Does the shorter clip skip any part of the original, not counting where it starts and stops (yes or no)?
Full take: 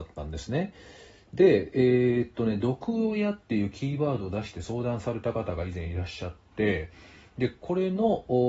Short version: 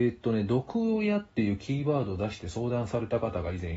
no